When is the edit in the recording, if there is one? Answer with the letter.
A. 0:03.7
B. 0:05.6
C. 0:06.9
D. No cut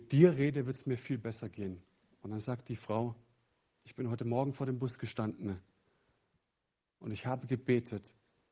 A